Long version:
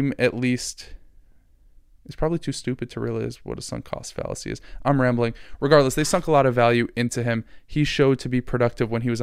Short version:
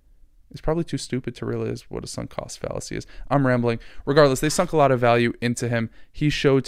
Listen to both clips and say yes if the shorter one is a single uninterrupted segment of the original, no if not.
yes